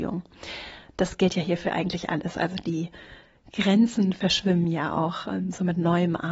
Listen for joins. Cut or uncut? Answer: uncut